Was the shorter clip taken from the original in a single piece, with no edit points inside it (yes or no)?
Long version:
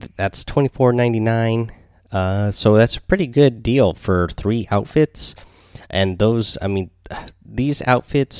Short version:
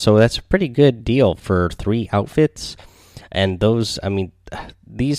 yes